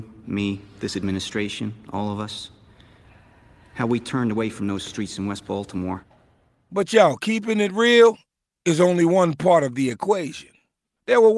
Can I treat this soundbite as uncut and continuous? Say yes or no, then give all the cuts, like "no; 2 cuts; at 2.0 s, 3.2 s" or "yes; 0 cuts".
yes; 0 cuts